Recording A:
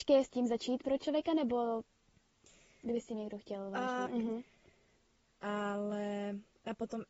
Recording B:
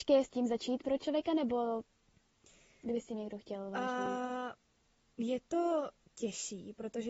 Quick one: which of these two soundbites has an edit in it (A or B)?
A